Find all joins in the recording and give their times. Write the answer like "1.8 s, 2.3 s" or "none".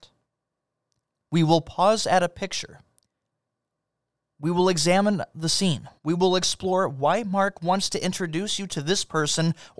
6.0 s